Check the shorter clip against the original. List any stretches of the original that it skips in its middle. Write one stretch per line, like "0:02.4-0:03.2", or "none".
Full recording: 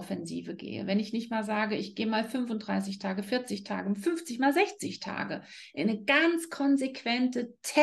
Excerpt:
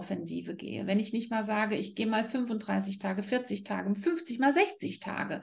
none